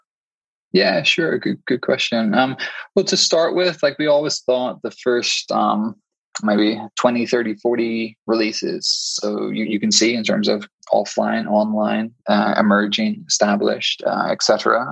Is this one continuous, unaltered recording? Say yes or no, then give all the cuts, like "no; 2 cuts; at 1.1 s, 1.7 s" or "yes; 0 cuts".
no; 2 cuts; at 6.4 s, 9.2 s